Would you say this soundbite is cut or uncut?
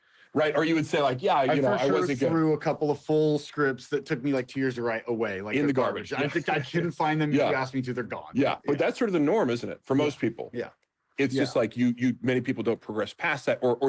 uncut